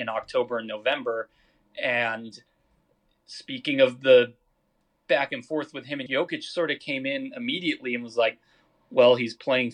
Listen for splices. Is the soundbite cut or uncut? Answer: cut